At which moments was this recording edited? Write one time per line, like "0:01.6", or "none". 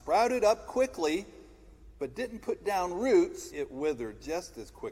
0:03.5